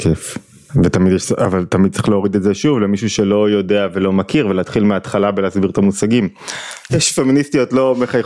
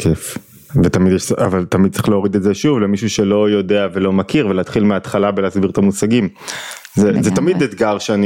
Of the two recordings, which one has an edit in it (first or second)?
first